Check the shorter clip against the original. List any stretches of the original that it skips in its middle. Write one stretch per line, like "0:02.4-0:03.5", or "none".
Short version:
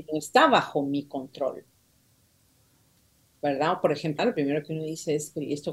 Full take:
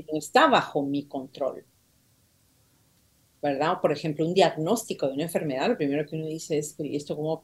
0:04.2-0:05.6